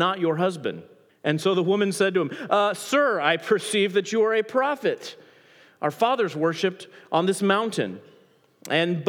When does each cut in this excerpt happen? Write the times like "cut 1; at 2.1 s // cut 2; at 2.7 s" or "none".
cut 1; at 1.1 s